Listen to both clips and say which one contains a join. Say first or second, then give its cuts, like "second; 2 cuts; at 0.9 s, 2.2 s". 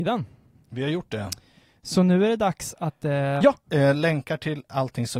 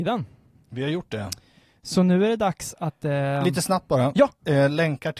first; 1 cut; at 3.4 s